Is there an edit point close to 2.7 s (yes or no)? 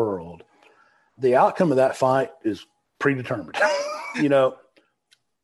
no